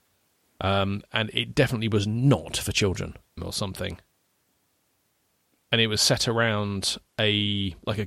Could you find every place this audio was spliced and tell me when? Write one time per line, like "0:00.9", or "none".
0:03.4